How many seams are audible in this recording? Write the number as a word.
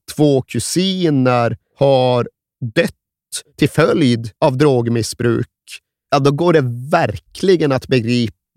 one